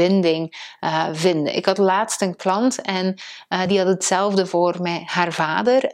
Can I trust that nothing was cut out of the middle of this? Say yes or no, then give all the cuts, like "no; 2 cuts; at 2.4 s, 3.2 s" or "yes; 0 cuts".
yes; 0 cuts